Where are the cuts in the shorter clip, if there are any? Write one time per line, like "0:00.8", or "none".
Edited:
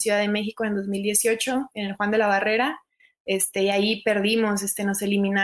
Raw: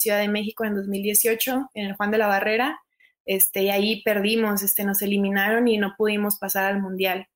none